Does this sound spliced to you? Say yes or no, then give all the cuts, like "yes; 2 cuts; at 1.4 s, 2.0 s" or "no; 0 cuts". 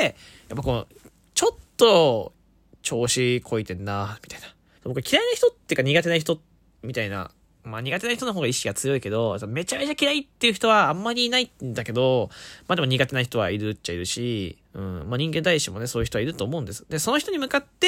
yes; 2 cuts; at 4.8 s, 14.6 s